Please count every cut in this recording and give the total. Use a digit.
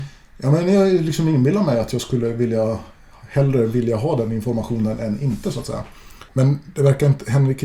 1